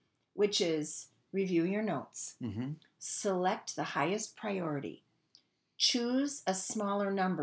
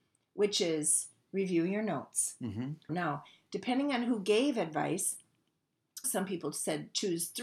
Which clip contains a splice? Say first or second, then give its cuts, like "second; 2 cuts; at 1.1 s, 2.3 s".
second; 2 cuts; at 2.9 s, 6.0 s